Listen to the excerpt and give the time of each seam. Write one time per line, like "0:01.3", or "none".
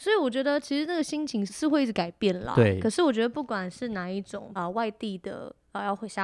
0:01.5
0:04.6

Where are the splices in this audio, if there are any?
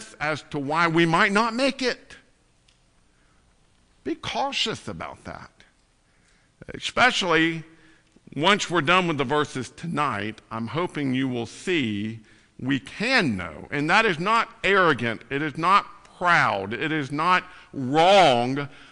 none

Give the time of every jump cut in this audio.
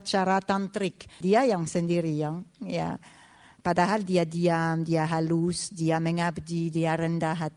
0:01.2
0:03.6

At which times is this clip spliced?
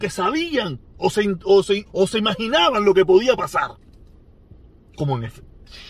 0:01.9

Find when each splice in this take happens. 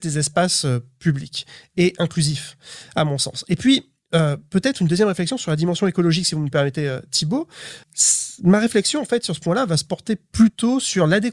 0:07.8

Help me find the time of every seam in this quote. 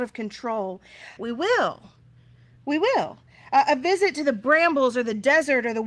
0:01.2

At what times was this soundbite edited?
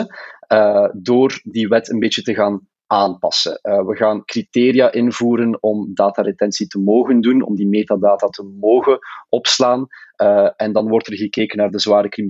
none

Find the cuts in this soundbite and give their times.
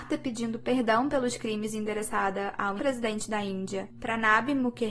0:02.8

